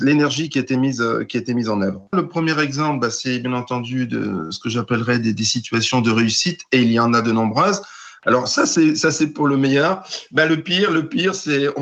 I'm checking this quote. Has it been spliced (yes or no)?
yes